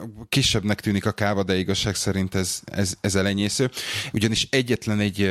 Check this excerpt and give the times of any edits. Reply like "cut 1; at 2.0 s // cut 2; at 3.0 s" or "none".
cut 1; at 4.1 s

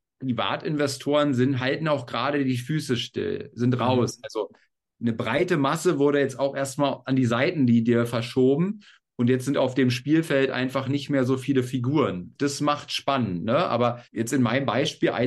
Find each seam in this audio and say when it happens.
none

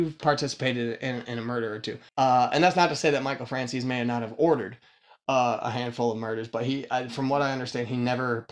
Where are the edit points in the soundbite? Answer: cut 1; at 2.1 s

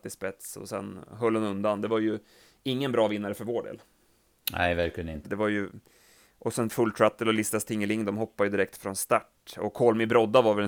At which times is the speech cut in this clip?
cut 1; at 5.2 s

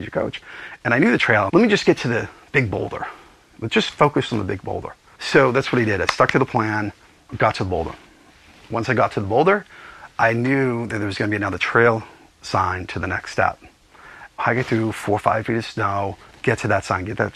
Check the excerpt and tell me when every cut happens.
cut 1; at 1.5 s // cut 2; at 5.2 s

